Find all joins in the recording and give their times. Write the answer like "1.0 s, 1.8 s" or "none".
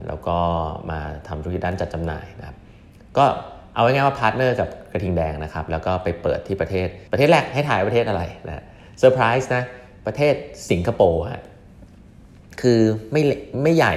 7.1 s